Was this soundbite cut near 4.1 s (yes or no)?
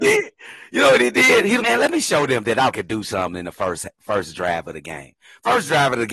no